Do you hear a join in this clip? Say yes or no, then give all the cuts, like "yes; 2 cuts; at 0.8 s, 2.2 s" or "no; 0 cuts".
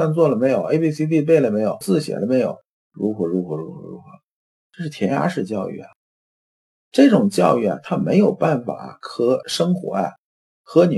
no; 0 cuts